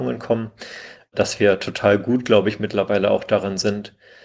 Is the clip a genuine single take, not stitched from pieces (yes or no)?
yes